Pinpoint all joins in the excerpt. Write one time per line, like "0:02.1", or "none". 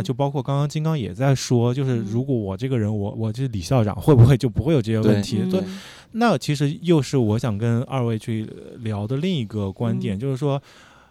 0:03.1